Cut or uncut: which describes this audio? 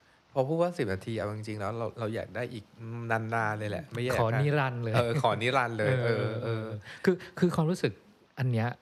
uncut